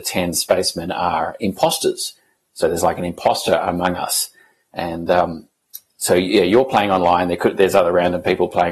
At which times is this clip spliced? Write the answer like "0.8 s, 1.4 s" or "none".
none